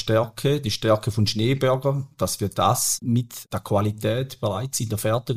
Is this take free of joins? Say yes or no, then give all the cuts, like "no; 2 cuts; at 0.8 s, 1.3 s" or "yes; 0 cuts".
yes; 0 cuts